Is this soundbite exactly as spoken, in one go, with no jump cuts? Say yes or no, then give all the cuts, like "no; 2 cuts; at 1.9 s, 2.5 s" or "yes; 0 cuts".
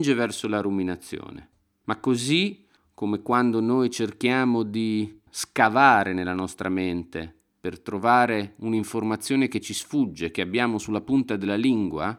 no; 1 cut; at 5.3 s